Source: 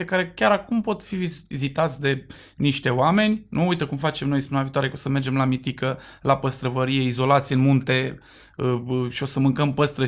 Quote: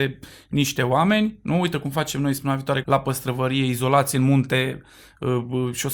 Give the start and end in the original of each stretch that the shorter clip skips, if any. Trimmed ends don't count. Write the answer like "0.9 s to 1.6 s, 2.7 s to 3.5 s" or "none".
4.9 s to 6.2 s